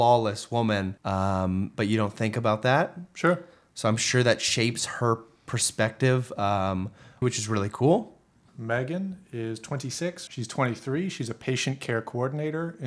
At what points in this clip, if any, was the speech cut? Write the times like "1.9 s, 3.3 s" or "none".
1.0 s, 7.2 s, 10.3 s